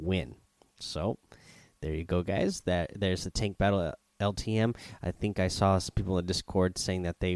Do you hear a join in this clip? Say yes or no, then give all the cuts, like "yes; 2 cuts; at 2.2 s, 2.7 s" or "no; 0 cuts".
no; 0 cuts